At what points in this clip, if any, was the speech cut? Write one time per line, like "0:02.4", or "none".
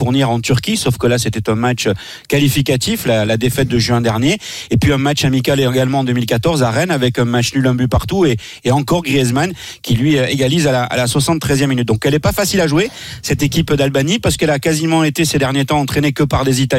none